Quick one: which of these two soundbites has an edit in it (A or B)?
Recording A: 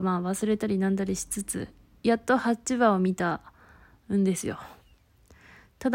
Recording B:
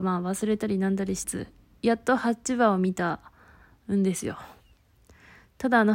B